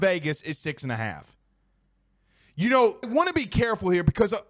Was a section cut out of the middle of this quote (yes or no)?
yes